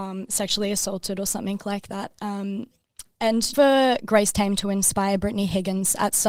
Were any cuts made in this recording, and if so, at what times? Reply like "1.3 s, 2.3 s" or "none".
3.5 s

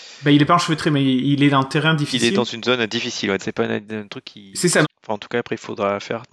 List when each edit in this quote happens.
3.4 s, 4.8 s

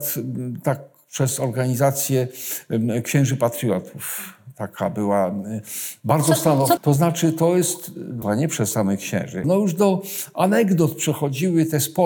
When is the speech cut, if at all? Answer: 6.8 s, 8.2 s, 9.4 s

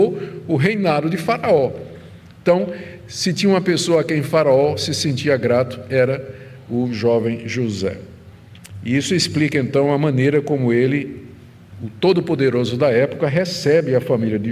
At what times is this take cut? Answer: none

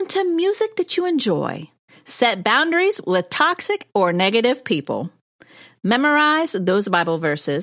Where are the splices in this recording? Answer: none

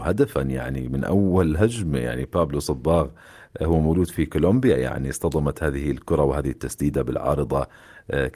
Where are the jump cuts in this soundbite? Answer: none

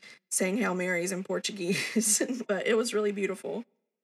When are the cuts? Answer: 2.5 s

